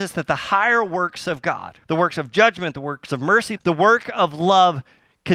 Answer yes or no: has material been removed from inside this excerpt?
yes